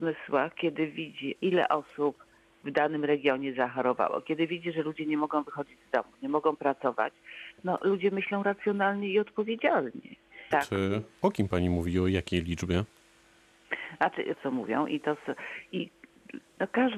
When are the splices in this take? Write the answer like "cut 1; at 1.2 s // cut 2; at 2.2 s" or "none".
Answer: cut 1; at 1.4 s // cut 2; at 10.5 s // cut 3; at 14.3 s